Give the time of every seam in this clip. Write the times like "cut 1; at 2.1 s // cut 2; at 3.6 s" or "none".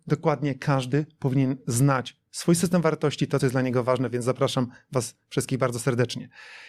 none